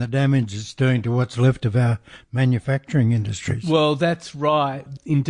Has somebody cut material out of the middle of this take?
no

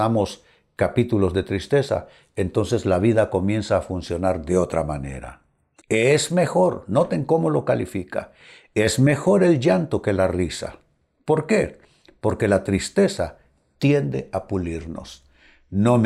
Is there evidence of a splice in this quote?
yes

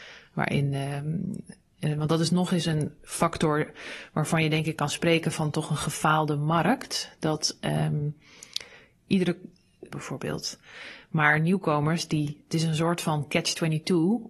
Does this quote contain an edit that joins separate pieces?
yes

